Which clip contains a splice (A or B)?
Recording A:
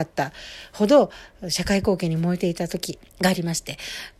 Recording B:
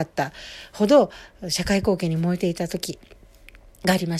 A